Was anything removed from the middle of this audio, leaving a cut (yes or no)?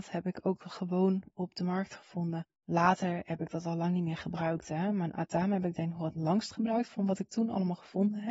no